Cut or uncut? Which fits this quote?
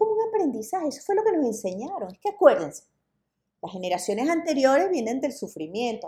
uncut